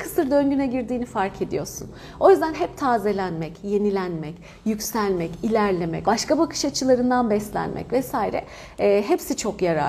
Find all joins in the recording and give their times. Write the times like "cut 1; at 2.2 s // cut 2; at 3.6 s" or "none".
cut 1; at 6.0 s